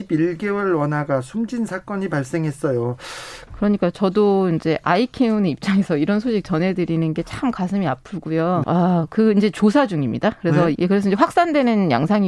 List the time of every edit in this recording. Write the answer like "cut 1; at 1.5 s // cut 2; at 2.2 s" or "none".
cut 1; at 3.5 s // cut 2; at 8.6 s // cut 3; at 10.7 s